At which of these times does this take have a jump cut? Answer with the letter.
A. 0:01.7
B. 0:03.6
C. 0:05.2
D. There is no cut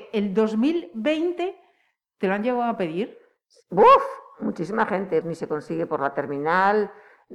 C